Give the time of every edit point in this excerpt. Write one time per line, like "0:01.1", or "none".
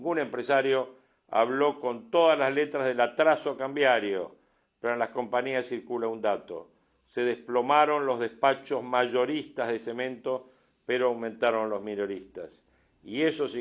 none